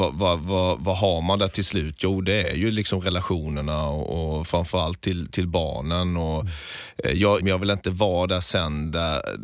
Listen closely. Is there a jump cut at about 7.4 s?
yes; 1 cut; at 7.4 s

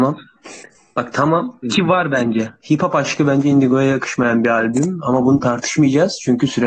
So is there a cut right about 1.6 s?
yes; 1 cut; at 1.6 s

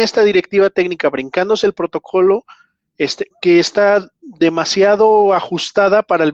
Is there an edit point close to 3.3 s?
yes; 1 cut; at 3.3 s

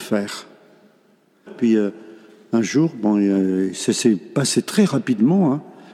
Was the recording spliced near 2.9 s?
no; 1 cut; at 1.5 s

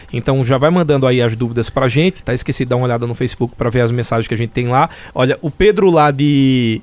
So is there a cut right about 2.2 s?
yes; 2 cuts; at 2.2 s, 5.1 s

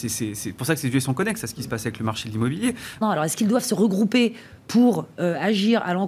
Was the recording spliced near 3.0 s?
yes; 1 cut; at 3.0 s

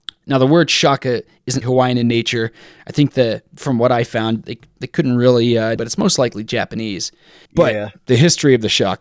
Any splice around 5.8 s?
yes; 3 cuts; at 1.6 s, 5.8 s, 7.5 s

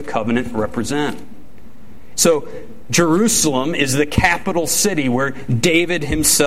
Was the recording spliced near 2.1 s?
yes; 1 cut; at 2.1 s

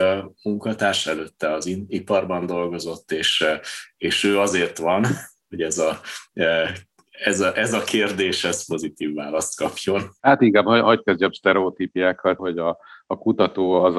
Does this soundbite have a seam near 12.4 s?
yes; 2 cuts; at 10.2 s, 12.4 s

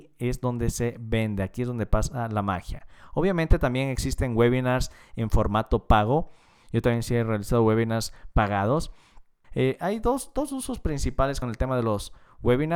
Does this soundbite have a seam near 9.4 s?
yes; 3 cuts; at 6.6 s, 9.4 s, 11.4 s

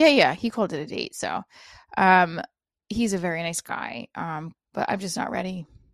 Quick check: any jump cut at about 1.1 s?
no; 1 cut; at 4.5 s

